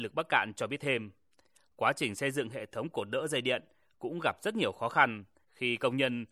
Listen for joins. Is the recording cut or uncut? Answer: uncut